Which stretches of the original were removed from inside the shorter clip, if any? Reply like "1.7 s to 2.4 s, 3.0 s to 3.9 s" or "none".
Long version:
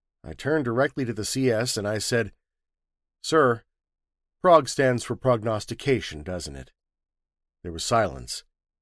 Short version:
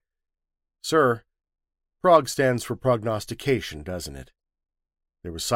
none

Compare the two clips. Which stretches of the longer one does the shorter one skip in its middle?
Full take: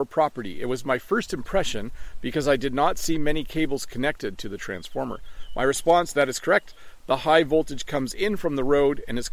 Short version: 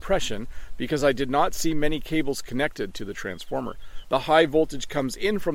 5.5 s to 7.0 s

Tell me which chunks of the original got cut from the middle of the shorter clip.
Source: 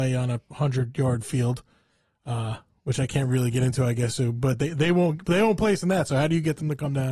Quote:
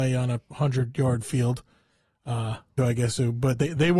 2.8 s to 3.8 s

